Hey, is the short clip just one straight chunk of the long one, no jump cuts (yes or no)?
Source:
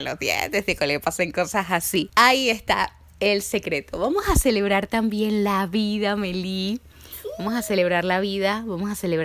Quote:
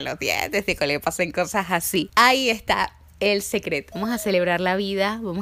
no